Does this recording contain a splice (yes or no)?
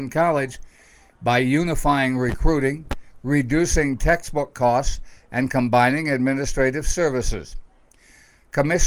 no